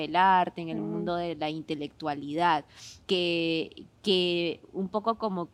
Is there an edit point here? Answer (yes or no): yes